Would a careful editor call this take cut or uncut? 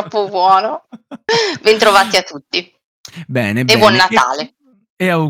uncut